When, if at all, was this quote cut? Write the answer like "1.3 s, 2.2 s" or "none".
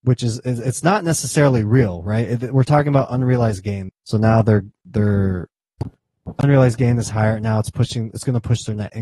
3.9 s